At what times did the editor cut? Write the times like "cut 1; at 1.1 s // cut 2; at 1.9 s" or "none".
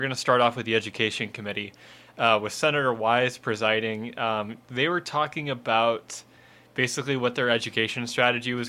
none